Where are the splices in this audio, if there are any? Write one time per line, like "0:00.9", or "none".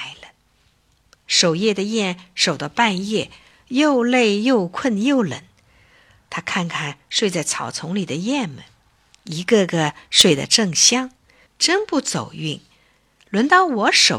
0:11.5